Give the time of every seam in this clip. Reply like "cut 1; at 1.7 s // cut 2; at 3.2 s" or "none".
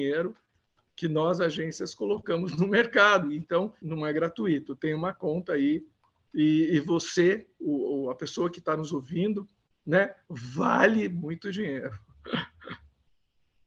cut 1; at 3.8 s